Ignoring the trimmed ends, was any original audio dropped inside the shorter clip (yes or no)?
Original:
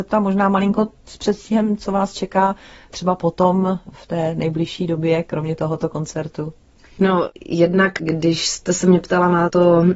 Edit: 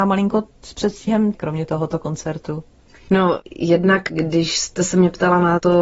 yes